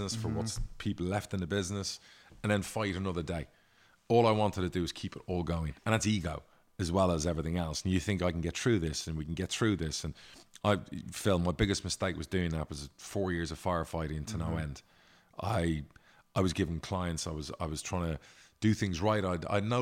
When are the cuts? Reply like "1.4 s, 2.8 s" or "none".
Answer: 5.8 s